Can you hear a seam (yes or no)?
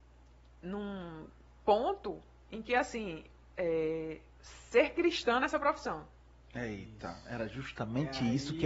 no